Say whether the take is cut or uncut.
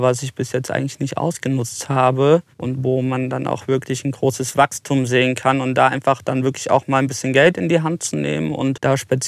cut